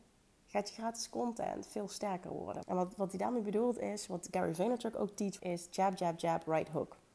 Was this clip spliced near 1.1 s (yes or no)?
no